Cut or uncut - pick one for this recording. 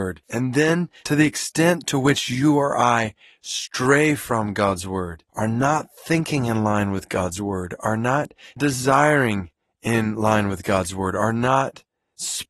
cut